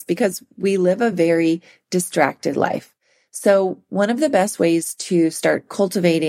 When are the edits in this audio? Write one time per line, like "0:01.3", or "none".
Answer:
none